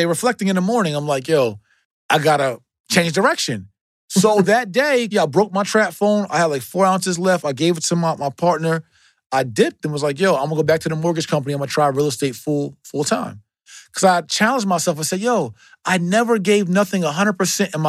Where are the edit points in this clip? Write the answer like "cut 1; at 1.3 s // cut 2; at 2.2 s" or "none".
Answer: cut 1; at 5.1 s